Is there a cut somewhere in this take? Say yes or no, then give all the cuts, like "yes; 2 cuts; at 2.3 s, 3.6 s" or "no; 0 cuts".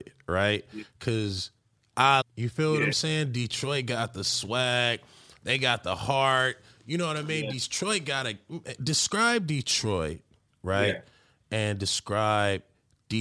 yes; 1 cut; at 2.2 s